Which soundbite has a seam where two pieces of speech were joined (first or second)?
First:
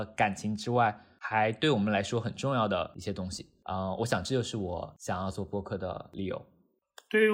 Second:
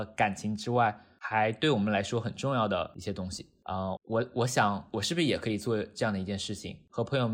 second